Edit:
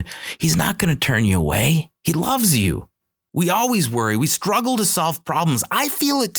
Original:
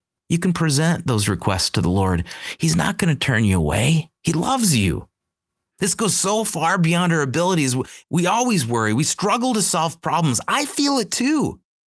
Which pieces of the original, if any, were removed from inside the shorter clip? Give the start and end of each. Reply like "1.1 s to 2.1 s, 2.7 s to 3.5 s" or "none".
5.5 s to 8.1 s